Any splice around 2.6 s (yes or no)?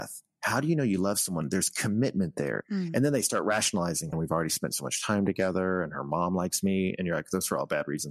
yes